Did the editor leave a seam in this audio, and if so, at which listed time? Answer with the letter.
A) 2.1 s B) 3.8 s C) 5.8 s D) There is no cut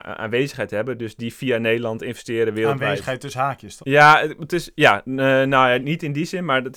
B